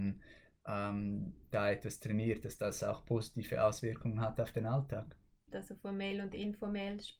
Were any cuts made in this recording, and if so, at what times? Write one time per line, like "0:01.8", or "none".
0:05.5